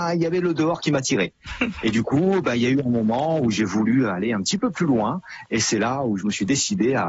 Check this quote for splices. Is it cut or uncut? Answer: uncut